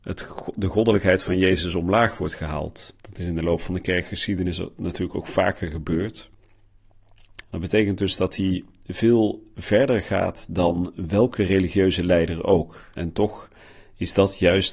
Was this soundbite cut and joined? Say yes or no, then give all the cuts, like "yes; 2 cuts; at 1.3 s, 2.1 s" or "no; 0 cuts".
yes; 2 cuts; at 7.4 s, 12.9 s